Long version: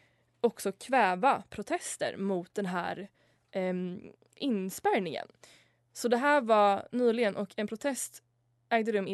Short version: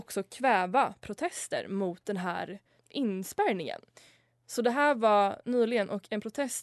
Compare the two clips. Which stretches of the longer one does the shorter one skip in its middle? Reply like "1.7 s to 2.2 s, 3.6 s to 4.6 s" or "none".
3.2 s to 4.2 s